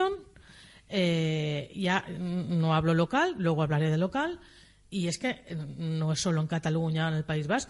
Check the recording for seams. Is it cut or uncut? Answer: cut